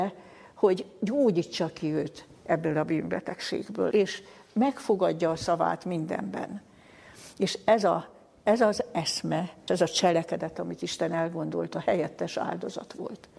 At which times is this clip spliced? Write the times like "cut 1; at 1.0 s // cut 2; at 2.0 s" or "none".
cut 1; at 3.9 s // cut 2; at 9.7 s